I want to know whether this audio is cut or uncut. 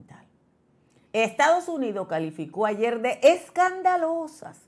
cut